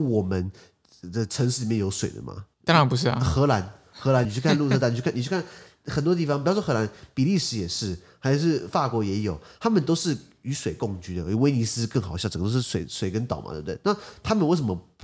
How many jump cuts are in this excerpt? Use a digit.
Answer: 2